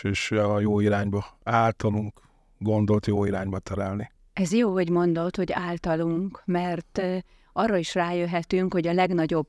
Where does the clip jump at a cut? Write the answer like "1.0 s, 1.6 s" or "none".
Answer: none